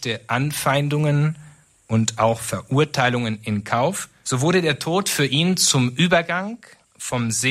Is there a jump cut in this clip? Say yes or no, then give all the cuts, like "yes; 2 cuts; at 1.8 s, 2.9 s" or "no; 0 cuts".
yes; 1 cut; at 4.2 s